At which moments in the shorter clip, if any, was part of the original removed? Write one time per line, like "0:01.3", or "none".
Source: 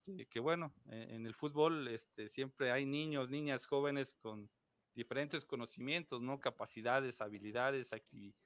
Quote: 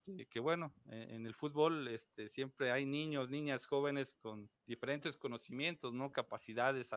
0:04.6